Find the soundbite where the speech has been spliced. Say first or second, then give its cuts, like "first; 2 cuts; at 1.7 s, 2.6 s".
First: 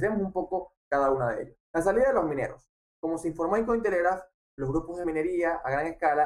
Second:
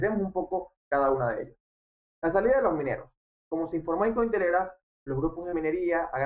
first; 1 cut; at 1.6 s